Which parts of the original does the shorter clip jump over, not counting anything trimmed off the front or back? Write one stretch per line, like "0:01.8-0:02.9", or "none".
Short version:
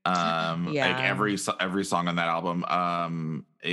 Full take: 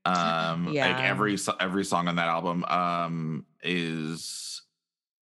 none